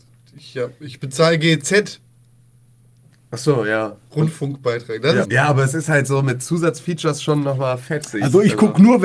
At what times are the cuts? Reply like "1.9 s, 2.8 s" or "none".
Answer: 5.2 s

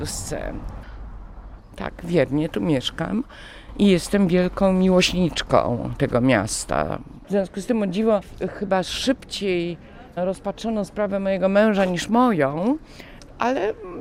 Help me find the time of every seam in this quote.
7.2 s

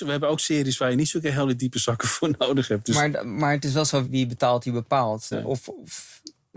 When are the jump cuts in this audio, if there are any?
4.0 s, 5.3 s

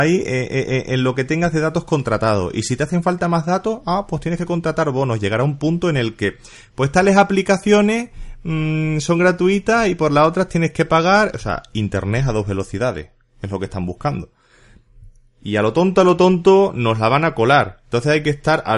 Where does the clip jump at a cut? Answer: none

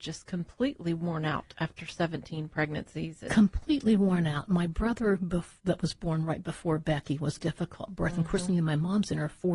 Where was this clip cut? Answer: 7.4 s

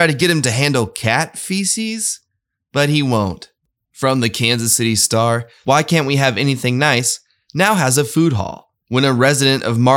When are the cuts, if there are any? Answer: 5.6 s

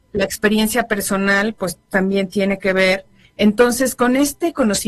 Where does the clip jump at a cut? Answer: 3.2 s

